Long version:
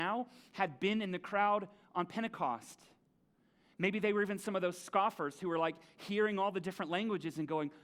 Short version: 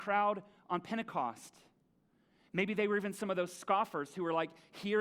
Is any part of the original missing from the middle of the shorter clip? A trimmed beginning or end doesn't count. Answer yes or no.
no